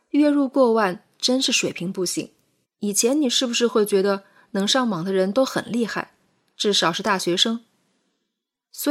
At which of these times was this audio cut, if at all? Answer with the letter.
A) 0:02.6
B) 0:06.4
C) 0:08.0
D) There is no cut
A